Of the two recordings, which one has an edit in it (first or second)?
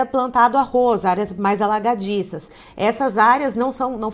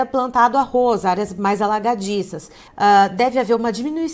second